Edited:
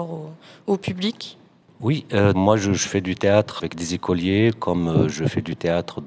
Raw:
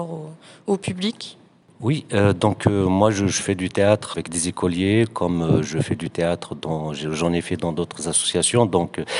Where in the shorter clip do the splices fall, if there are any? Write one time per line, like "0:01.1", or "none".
0:02.3